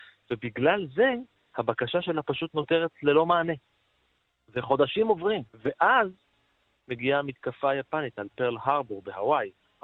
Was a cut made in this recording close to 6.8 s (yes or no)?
no